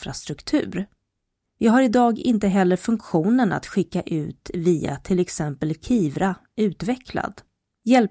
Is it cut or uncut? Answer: cut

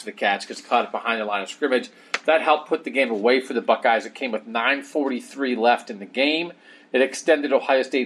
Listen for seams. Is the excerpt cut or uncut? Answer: uncut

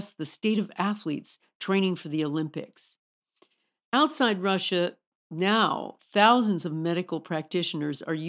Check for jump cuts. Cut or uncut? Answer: uncut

